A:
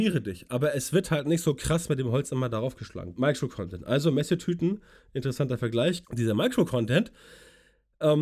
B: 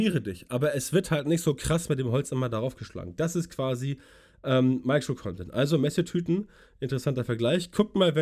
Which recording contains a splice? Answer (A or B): A